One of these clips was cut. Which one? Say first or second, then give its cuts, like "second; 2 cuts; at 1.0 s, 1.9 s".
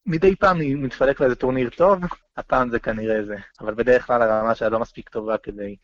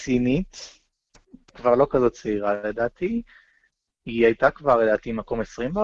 first; 1 cut; at 3.5 s